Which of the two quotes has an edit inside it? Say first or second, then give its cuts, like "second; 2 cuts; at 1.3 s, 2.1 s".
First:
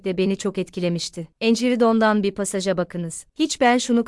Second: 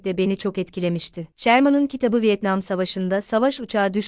first; 1 cut; at 1.3 s